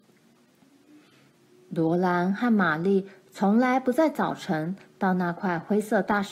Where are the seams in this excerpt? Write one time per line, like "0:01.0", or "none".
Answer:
none